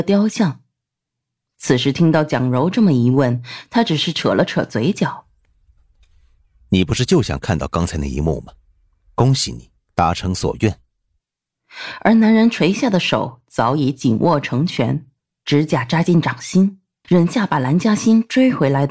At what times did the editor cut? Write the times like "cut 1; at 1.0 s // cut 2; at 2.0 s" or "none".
cut 1; at 17.0 s